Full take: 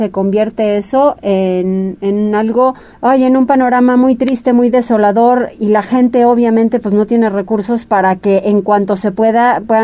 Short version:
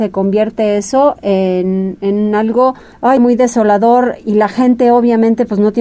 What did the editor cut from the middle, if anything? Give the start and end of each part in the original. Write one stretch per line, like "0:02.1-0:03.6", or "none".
0:03.2-0:04.5